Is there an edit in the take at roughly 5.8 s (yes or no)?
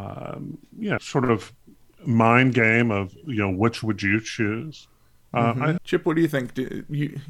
yes